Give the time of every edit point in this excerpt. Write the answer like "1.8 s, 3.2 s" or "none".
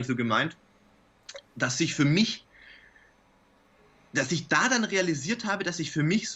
none